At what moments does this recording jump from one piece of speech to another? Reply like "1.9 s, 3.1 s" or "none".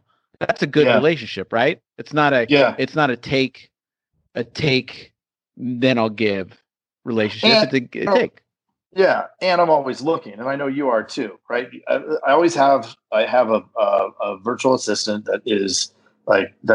8.1 s